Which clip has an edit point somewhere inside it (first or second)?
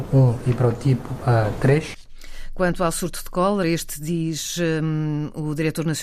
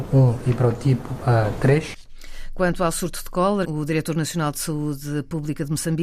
second